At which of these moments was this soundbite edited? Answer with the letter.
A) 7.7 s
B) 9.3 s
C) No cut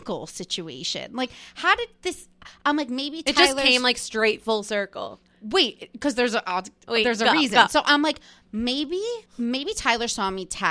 B